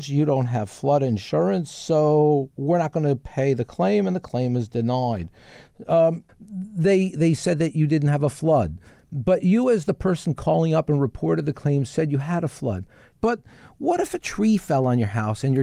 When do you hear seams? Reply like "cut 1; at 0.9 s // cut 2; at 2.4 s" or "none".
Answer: cut 1; at 6.3 s // cut 2; at 13.1 s